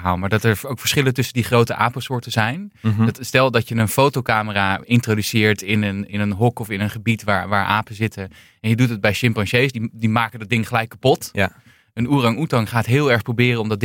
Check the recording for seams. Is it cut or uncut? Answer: uncut